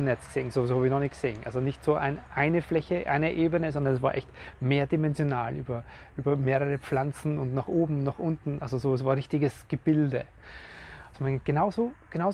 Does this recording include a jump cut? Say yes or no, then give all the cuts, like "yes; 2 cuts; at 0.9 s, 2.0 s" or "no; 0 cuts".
yes; 1 cut; at 11.1 s